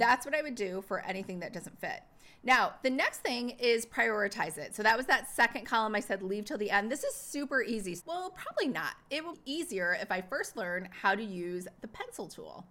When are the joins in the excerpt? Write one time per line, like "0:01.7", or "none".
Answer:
0:08.0
0:09.3